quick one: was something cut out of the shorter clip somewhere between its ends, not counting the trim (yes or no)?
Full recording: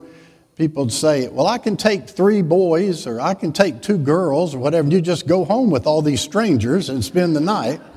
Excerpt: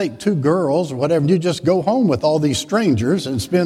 no